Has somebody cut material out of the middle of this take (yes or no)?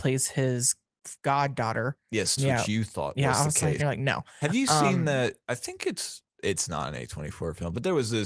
yes